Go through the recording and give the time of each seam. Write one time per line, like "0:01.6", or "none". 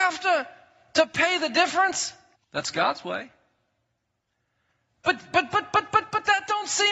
0:02.4